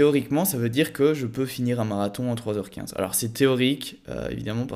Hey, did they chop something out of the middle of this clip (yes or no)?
no